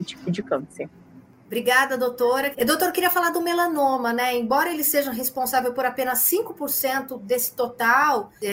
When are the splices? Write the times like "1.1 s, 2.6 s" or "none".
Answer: 2.5 s